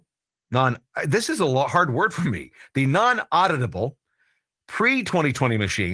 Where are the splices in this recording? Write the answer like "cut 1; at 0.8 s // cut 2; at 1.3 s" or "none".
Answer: none